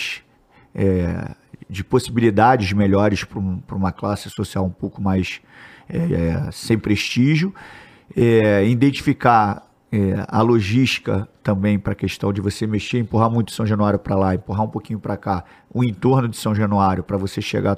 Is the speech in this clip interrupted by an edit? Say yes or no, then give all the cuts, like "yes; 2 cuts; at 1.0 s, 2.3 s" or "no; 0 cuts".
no; 0 cuts